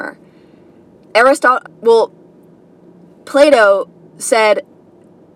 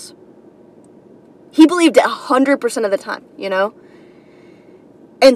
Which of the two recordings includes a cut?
first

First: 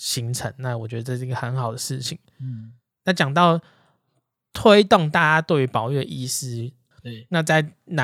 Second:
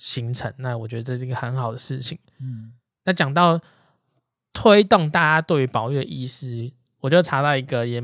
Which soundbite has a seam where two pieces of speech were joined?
first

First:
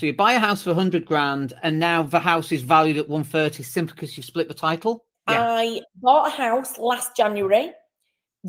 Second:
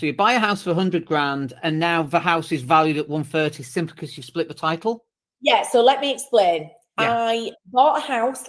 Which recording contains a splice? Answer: first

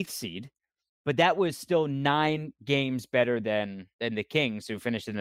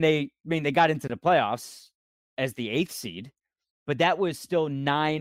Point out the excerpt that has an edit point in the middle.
first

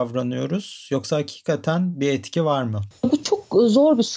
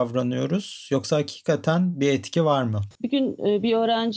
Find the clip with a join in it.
second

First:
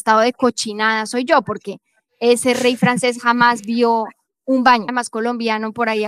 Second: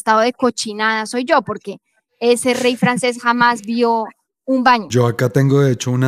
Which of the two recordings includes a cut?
first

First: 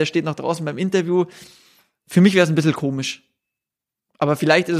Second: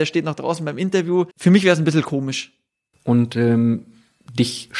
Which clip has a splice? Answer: second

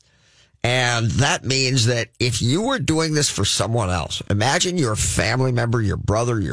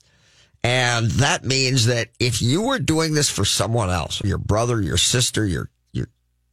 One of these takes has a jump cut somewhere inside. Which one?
second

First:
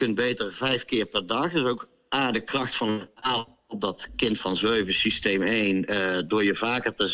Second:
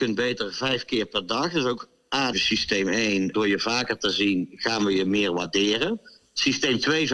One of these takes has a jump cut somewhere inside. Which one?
second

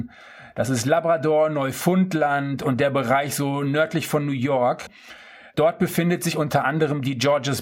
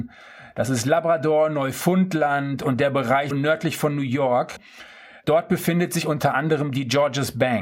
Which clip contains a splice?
second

